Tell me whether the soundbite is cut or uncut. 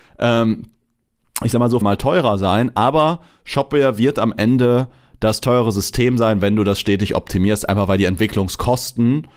cut